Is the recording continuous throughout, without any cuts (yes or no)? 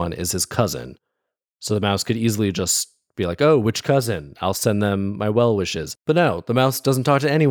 yes